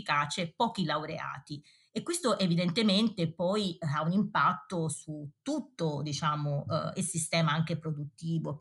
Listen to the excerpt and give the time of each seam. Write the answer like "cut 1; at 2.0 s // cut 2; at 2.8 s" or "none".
none